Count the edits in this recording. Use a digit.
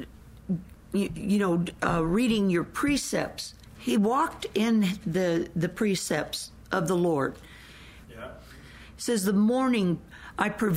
2